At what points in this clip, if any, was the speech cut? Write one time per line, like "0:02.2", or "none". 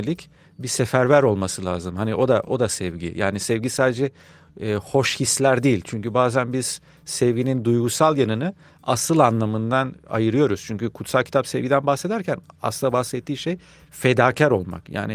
none